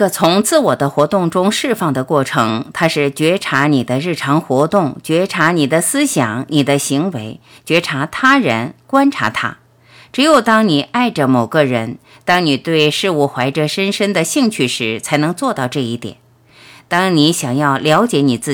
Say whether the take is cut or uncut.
uncut